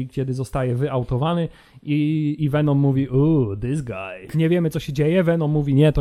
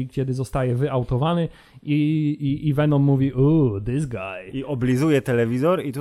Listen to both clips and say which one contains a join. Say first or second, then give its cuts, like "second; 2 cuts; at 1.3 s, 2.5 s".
first; 2 cuts; at 2.4 s, 4.3 s